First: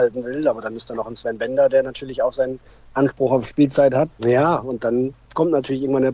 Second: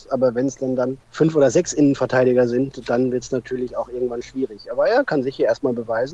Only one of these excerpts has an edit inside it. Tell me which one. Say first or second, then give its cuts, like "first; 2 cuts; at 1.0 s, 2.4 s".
first; 1 cut; at 4.1 s